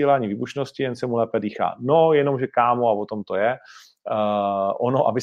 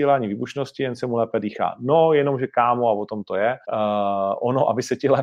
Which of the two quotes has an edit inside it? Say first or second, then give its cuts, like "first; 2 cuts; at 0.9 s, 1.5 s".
second; 1 cut; at 3.6 s